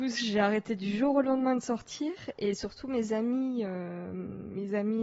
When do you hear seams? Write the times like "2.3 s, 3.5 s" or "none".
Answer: none